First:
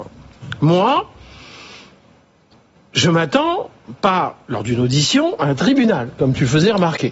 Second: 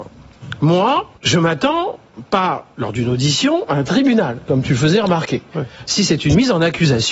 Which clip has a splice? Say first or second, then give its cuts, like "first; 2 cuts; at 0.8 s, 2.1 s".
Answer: second; 2 cuts; at 1.2 s, 5.9 s